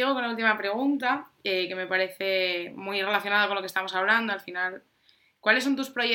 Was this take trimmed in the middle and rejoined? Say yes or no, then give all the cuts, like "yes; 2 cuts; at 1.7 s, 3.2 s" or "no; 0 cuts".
no; 0 cuts